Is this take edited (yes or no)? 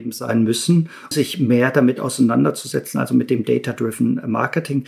yes